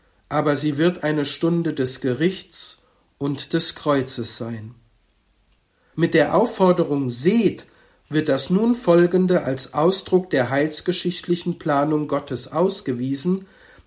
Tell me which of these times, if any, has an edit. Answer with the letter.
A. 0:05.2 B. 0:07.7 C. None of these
C